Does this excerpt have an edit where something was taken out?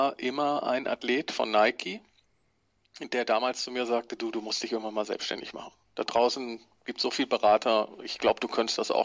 no; 0 cuts

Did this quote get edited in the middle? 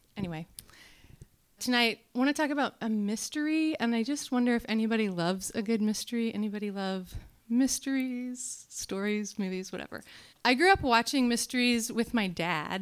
yes; 2 cuts; at 1.6 s, 10.3 s

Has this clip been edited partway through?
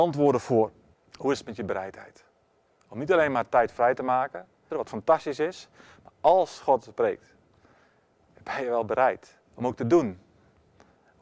yes; 3 cuts; at 0.9 s, 4.7 s, 9.5 s

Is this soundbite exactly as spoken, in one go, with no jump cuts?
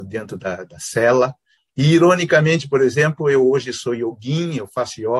no; 1 cut; at 1.7 s

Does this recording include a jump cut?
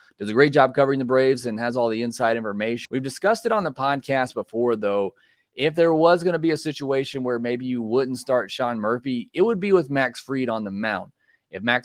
yes; 1 cut; at 2.9 s

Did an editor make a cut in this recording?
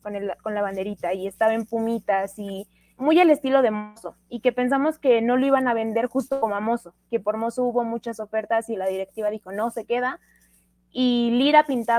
yes; 1 cut; at 3.0 s

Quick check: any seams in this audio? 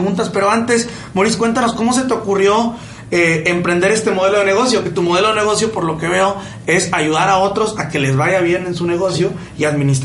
no; 0 cuts

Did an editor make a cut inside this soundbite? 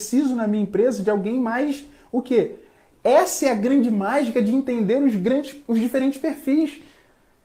yes; 1 cut; at 2.9 s

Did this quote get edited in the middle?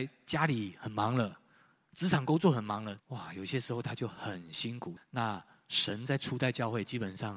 yes; 2 cuts; at 3.0 s, 5.0 s

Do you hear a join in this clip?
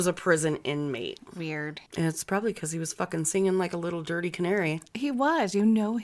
yes; 1 cut; at 1.9 s

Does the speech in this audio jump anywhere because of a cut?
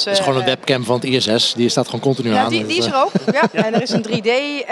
no; 0 cuts

